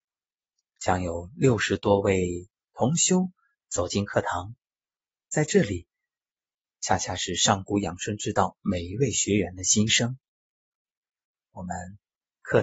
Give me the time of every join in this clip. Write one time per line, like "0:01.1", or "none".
0:06.7